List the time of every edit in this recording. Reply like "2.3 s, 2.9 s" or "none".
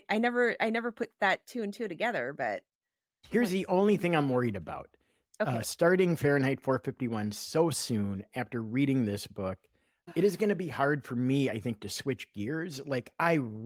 none